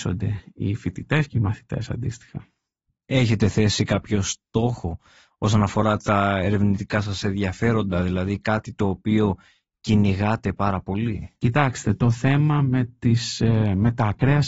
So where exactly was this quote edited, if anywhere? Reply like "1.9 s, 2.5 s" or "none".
none